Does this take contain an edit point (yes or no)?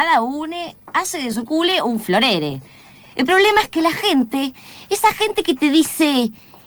no